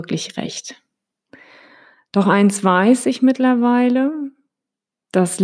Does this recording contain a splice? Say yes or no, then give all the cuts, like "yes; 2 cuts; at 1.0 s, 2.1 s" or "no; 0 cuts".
no; 0 cuts